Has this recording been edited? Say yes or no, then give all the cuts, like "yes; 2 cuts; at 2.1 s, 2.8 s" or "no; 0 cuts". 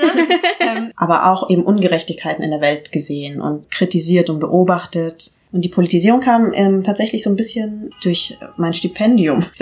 yes; 1 cut; at 0.9 s